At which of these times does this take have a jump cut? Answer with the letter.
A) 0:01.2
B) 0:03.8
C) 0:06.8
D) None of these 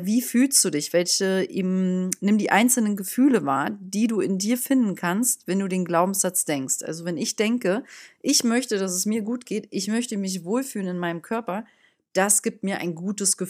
D